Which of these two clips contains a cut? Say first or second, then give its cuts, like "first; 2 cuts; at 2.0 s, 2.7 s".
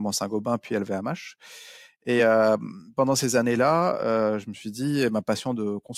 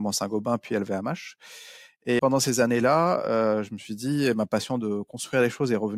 second; 1 cut; at 2.2 s